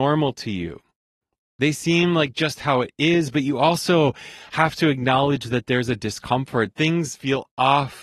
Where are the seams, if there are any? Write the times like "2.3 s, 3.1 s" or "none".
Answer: 6.7 s